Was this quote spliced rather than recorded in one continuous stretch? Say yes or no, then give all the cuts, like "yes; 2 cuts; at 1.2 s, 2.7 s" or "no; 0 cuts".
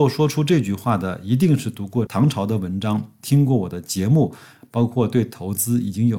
yes; 1 cut; at 2.1 s